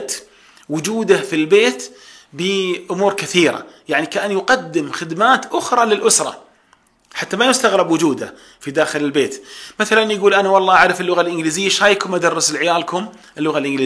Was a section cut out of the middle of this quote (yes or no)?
no